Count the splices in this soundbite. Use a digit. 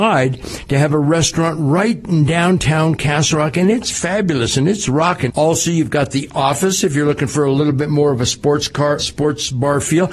2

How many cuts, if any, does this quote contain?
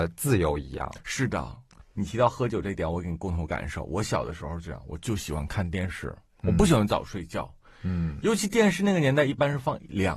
0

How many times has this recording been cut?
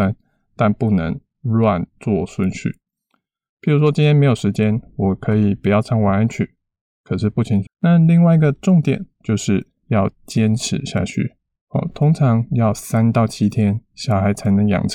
1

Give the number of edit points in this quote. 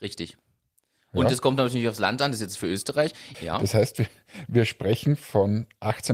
1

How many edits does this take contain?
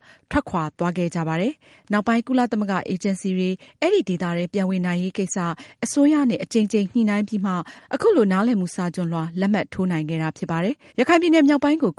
1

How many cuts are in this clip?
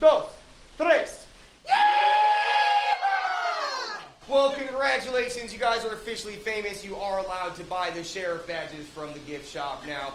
0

